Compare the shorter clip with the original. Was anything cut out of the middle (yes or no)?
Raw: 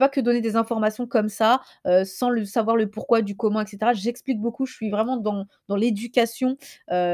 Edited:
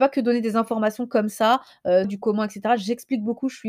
yes